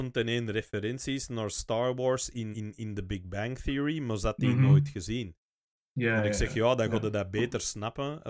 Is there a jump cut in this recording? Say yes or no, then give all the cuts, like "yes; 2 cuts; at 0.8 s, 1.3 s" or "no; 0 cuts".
yes; 1 cut; at 2.5 s